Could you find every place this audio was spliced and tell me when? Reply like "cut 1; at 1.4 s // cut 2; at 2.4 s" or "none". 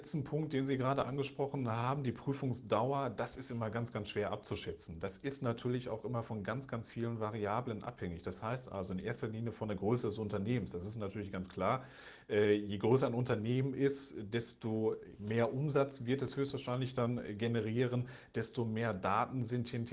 none